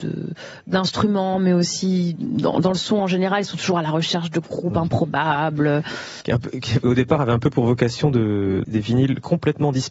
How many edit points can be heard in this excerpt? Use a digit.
2